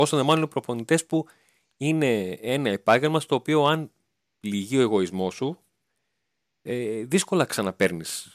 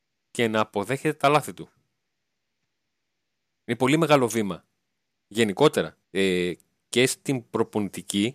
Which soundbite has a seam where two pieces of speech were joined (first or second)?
second